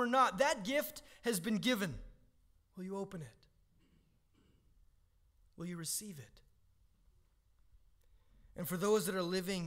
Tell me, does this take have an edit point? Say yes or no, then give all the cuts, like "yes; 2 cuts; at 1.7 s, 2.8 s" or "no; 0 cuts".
yes; 1 cut; at 2.6 s